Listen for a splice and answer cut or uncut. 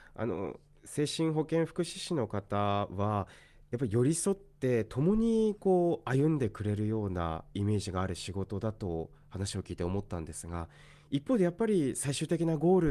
uncut